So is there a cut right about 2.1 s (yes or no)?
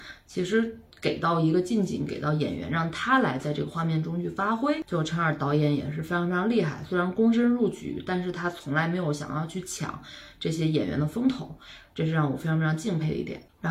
yes